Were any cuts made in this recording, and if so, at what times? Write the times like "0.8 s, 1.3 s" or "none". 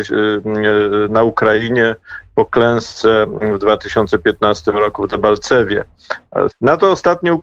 6.5 s